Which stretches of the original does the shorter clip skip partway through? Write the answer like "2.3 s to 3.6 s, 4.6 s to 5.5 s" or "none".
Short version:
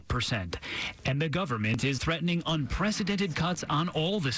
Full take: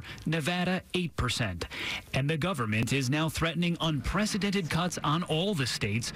3.1 s to 3.3 s